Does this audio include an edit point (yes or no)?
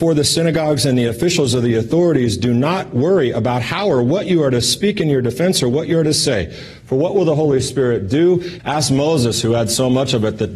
yes